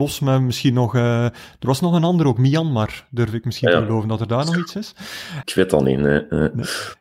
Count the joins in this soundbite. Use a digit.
1